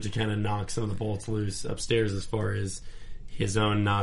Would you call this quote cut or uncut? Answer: uncut